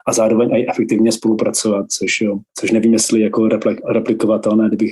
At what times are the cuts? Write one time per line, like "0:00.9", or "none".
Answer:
0:02.5